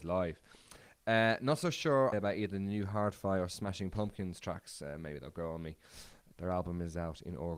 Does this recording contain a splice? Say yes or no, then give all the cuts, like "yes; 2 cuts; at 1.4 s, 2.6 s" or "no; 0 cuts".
yes; 2 cuts; at 2.1 s, 6.3 s